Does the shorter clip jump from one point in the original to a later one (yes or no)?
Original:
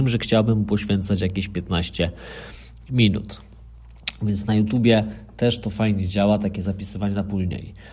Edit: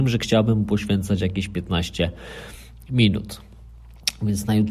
no